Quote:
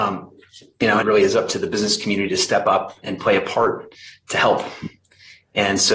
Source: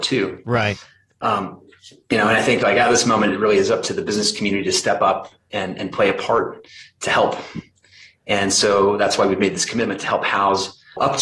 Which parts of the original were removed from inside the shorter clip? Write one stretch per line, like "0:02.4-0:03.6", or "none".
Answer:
0:02.3-0:03.3
0:05.4-0:05.8